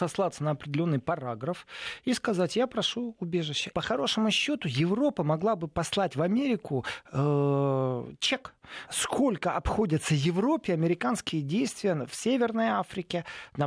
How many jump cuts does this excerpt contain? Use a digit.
2